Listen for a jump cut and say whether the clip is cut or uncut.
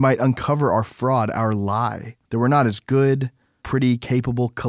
cut